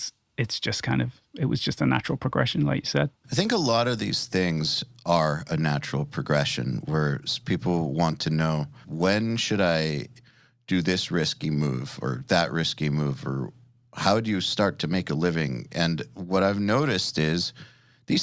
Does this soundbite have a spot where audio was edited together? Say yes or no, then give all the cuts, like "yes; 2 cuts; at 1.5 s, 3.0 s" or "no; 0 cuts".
yes; 1 cut; at 8.8 s